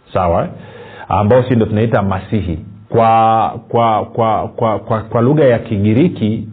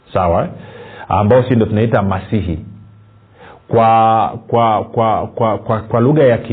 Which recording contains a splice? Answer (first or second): first